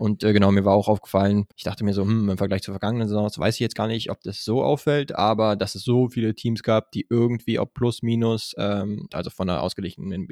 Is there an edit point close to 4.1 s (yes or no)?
no